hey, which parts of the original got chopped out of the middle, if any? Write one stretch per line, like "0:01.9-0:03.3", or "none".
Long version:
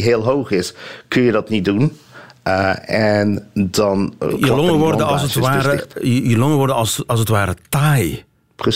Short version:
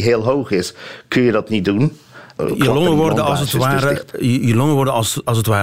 0:02.4-0:04.2

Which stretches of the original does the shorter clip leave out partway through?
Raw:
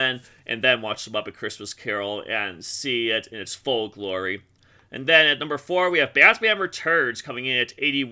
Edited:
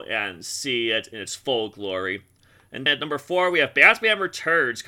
0:05.1-0:05.3

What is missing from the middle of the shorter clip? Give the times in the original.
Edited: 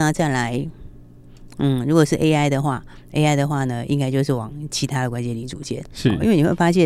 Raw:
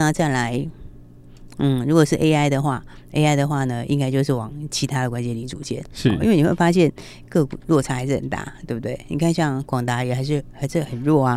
none

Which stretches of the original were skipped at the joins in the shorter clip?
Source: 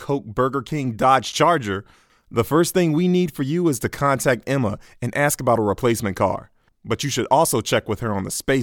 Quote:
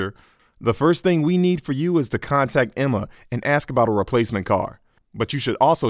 none

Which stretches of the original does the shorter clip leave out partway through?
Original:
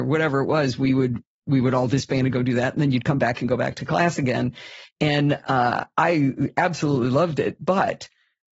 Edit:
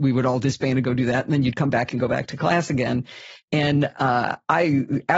none

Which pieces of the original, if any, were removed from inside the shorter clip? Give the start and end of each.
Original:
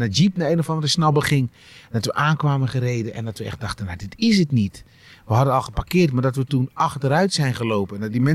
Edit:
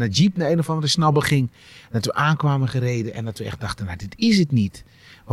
none

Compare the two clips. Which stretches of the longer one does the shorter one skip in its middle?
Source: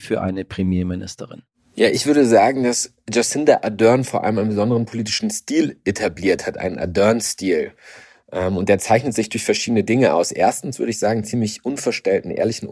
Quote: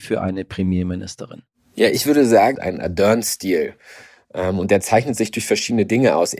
0:02.5-0:06.5

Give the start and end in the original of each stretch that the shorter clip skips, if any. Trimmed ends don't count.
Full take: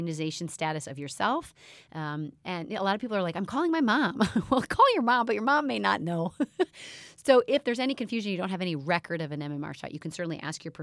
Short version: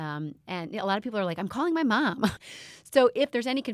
0:04.3-0:06.7

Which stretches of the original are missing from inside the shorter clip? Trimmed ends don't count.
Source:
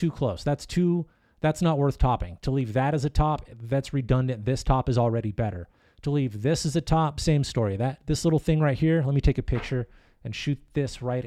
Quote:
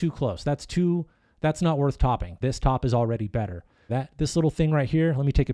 0:02.4-0:04.4
0:05.9-0:07.8

